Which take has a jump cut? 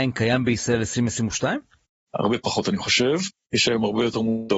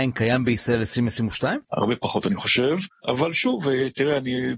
second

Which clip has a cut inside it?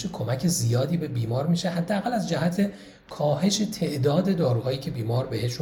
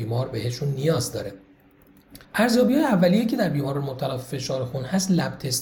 second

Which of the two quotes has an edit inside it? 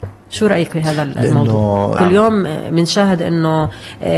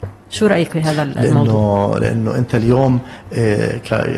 first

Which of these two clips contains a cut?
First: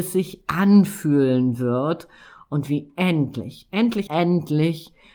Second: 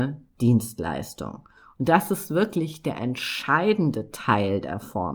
first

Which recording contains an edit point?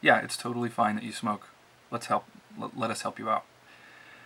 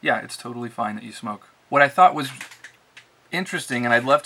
second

